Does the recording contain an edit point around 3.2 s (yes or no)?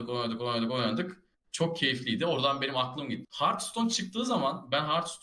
yes